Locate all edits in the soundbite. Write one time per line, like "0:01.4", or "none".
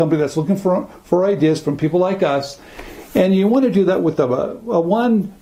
none